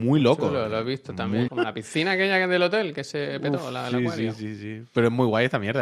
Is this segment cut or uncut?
cut